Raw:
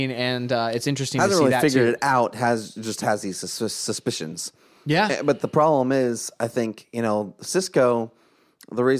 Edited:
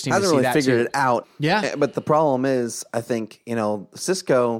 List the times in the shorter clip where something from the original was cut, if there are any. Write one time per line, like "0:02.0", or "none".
0:01.2